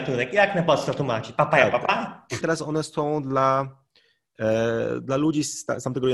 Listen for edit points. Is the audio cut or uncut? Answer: cut